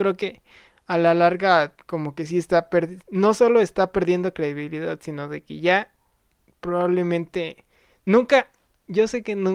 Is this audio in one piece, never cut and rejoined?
yes; 0 cuts

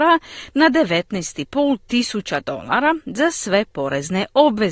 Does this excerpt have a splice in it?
no; 0 cuts

